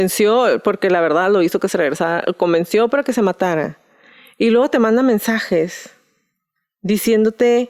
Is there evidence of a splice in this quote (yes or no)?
no